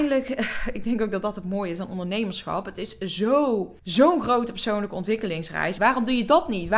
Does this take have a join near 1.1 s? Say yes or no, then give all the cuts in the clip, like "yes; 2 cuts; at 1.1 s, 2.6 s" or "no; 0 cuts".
no; 2 cuts; at 3.8 s, 5.8 s